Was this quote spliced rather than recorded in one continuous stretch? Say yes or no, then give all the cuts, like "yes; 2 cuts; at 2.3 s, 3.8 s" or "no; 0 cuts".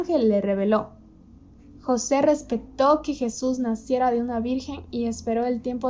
no; 0 cuts